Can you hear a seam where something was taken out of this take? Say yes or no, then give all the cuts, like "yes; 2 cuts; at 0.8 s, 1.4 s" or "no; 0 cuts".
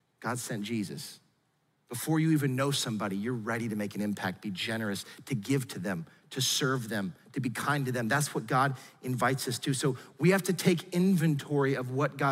no; 0 cuts